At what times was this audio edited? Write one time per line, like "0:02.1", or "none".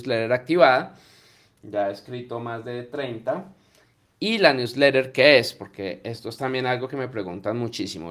none